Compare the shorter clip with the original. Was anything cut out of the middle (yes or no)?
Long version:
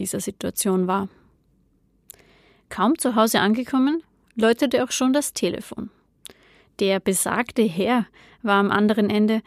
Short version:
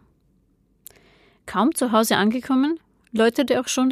no